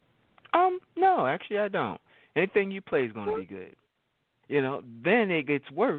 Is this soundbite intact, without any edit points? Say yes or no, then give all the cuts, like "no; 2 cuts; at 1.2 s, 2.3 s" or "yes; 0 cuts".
no; 1 cut; at 4.4 s